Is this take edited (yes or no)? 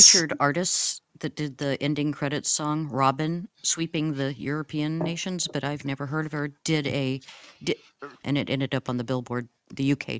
yes